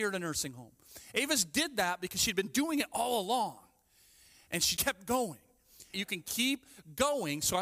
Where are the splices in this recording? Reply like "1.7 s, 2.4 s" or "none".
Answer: 4.8 s, 5.9 s